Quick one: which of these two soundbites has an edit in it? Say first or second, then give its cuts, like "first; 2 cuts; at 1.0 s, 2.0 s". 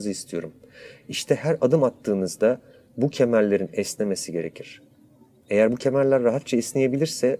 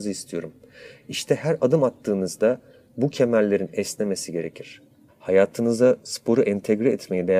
second; 1 cut; at 5.1 s